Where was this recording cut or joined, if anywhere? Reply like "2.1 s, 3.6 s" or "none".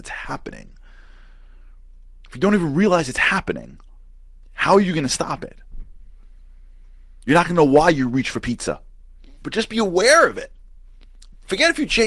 9.4 s